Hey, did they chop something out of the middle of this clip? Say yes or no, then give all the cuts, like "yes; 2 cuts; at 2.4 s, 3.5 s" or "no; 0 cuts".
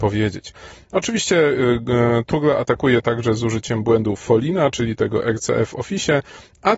no; 0 cuts